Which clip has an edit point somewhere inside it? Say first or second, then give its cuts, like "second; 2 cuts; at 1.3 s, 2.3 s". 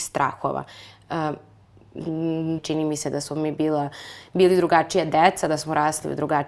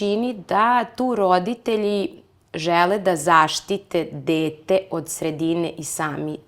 first; 1 cut; at 2.6 s